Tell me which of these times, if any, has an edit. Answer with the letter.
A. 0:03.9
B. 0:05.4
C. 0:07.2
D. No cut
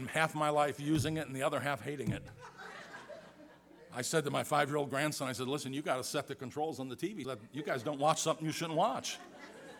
C